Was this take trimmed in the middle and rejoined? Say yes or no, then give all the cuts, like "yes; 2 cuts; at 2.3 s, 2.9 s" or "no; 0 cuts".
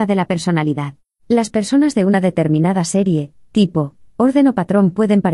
yes; 1 cut; at 1.2 s